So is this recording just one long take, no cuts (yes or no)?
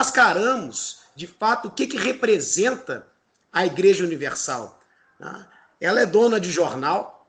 yes